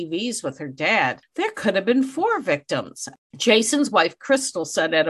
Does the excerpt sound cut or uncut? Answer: uncut